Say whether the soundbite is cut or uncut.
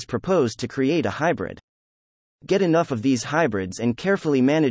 uncut